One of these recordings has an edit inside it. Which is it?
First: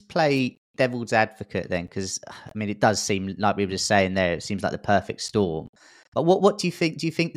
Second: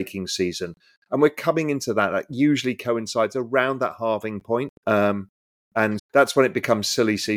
second; 2 cuts; at 4.8 s, 6.0 s

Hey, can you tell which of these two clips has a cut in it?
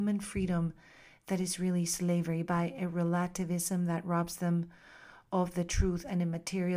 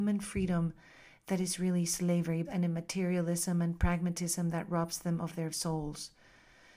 second; 2 cuts; at 2.4 s, 5.5 s

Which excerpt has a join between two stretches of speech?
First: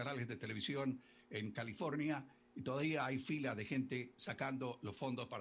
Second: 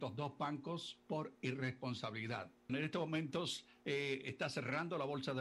second; 1 cut; at 2.7 s

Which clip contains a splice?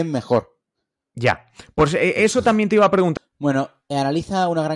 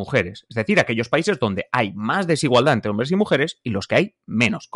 first; 1 cut; at 3.2 s

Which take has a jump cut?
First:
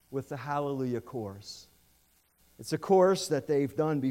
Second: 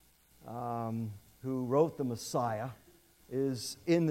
second; 1 cut; at 1.3 s

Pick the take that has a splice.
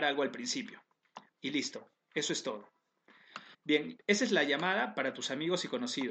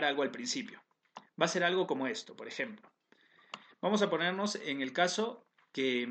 first; 2 cuts; at 1.3 s, 3.5 s

